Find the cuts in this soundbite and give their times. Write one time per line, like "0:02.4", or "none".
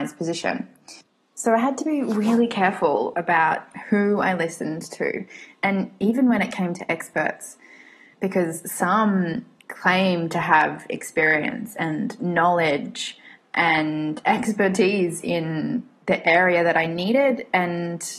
none

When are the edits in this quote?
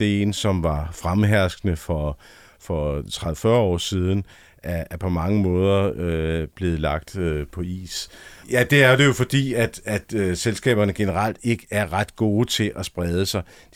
0:08.4

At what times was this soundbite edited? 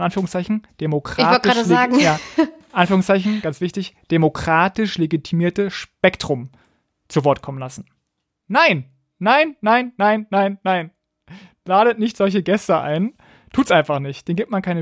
none

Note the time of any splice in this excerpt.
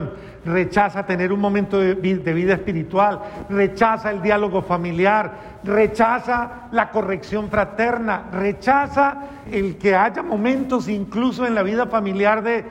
0:09.5

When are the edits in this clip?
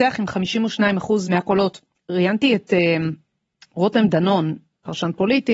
none

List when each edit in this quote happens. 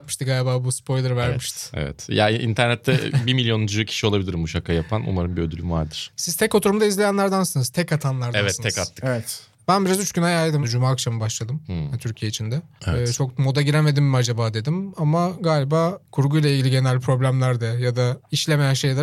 0:10.6

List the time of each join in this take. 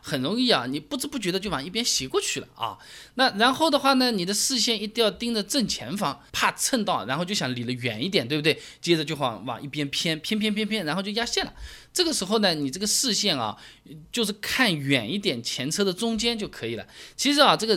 0:06.3

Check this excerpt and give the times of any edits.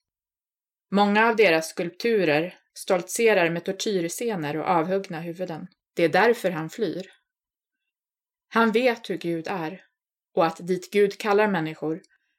0:02.7
0:05.8

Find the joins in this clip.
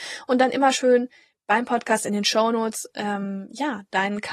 none

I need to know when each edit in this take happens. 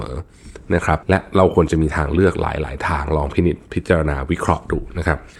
0:01.0

